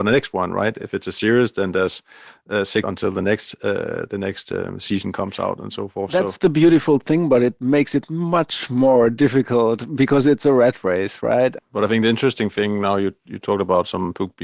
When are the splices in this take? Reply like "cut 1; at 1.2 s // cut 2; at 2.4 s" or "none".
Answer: cut 1; at 2.8 s // cut 2; at 11.6 s